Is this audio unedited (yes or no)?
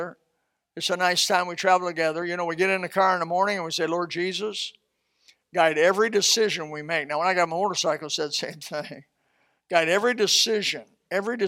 yes